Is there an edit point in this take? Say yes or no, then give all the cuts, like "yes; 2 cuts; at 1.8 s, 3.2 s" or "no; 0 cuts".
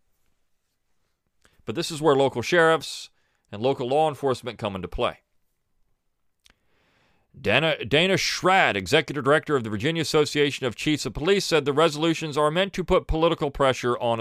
no; 0 cuts